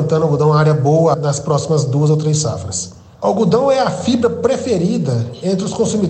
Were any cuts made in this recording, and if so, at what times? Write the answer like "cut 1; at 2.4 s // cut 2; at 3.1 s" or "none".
cut 1; at 1.1 s